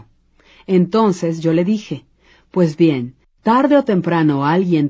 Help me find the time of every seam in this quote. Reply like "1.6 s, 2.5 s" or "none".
3.2 s